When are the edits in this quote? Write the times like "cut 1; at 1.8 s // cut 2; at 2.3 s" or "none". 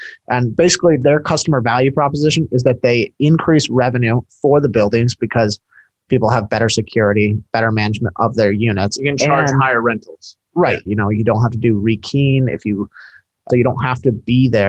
cut 1; at 10.9 s // cut 2; at 13.5 s